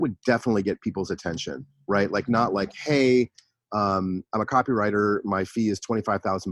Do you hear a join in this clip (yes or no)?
no